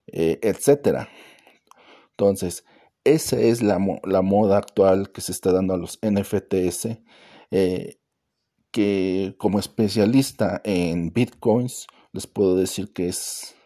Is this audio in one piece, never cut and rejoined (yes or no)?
yes